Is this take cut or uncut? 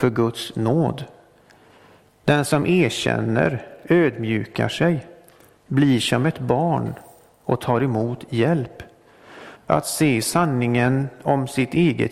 cut